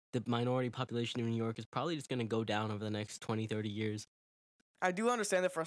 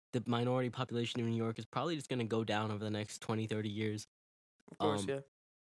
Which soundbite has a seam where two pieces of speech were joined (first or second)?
first